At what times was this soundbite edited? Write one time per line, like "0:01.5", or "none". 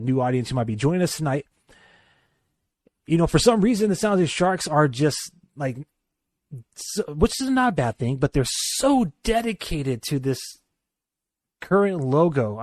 none